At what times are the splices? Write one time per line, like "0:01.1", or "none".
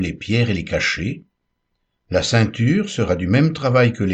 0:02.0